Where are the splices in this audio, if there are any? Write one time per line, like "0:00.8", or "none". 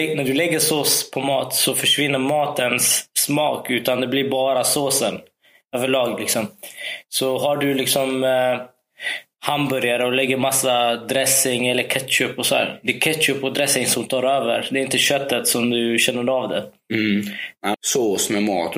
0:17.7